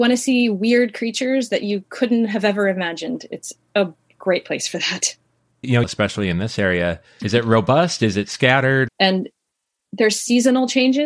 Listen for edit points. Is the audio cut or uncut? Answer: cut